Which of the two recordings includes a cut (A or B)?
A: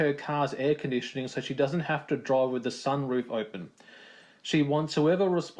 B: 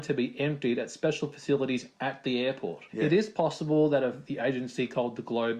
B